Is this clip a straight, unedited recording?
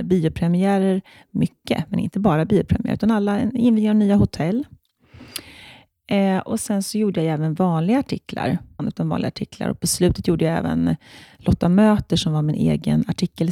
no; 1 cut; at 8.8 s

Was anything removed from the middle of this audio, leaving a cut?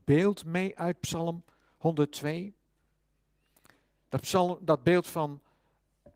no; 0 cuts

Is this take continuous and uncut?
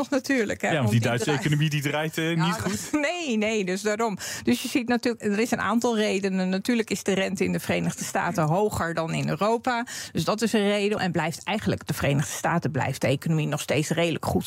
no; 2 cuts; at 5.2 s, 11.0 s

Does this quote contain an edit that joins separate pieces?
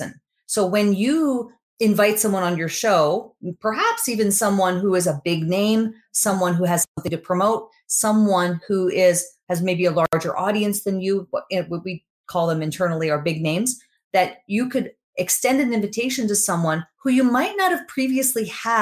no; 0 cuts

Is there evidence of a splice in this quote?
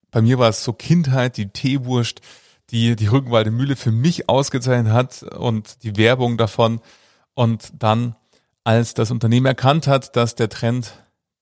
no; 0 cuts

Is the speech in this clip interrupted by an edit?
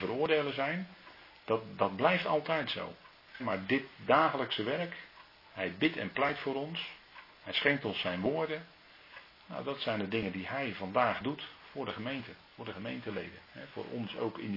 yes; 1 cut; at 3.4 s

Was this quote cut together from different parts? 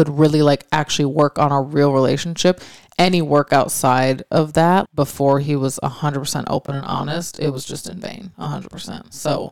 yes; 1 cut; at 4.9 s

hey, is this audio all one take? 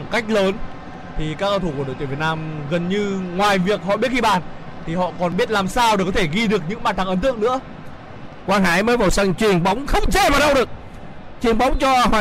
no; 1 cut; at 8.4 s

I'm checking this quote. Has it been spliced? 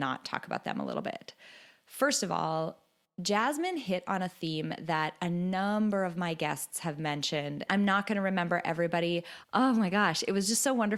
yes; 2 cuts; at 7.7 s, 9.4 s

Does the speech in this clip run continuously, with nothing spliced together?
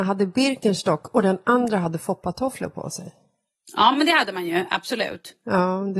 yes; 0 cuts

